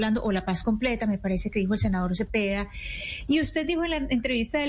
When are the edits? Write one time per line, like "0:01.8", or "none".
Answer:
none